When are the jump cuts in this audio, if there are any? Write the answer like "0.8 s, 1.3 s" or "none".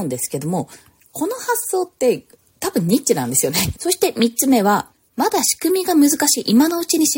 3.7 s